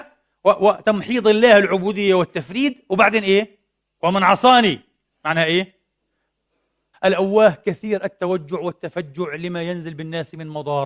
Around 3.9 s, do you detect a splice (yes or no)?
no